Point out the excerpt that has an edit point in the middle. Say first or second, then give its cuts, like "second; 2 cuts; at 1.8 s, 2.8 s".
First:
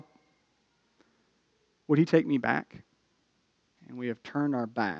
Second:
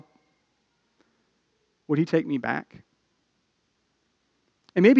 first; 1 cut; at 3.8 s